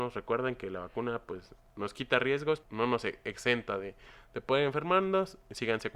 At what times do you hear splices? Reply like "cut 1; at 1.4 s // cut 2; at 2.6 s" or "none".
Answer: cut 1; at 2.6 s